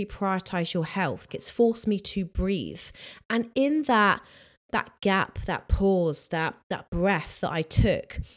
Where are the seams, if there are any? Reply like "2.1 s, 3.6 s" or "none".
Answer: 1.3 s